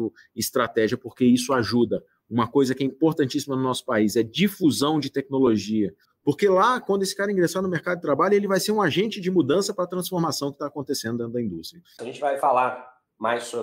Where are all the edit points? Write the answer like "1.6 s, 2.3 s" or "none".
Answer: 6.1 s, 12.0 s